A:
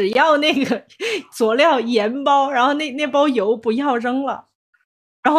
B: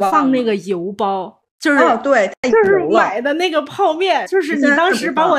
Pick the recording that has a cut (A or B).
B